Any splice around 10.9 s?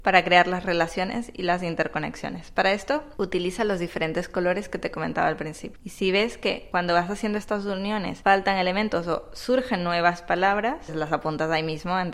yes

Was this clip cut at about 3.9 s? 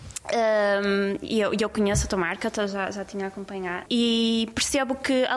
yes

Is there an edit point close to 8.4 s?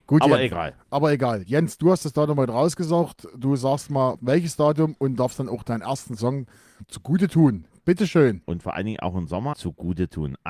yes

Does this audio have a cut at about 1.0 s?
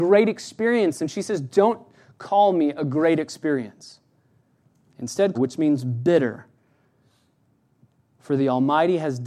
no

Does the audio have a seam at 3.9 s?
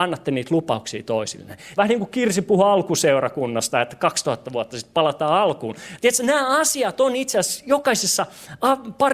no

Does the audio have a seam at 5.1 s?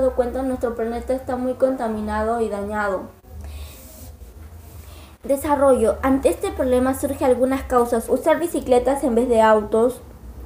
no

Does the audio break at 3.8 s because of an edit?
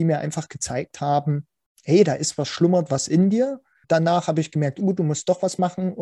yes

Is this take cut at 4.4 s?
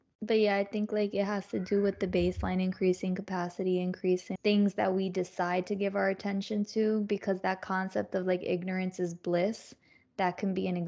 yes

